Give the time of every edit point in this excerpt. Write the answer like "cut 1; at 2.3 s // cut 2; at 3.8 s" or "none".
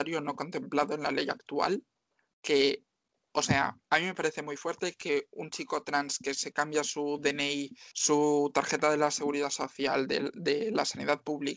cut 1; at 3.8 s // cut 2; at 7.9 s